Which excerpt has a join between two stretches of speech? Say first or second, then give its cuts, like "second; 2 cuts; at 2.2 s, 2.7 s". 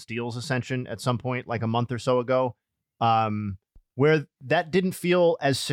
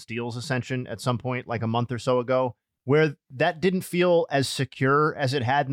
second; 1 cut; at 2.8 s